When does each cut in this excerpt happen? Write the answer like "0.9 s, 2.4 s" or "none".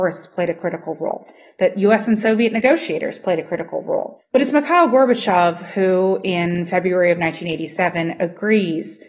none